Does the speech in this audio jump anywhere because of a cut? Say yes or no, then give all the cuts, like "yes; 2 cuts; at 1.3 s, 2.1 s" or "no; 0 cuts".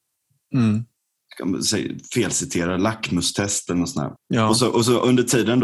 yes; 1 cut; at 4.2 s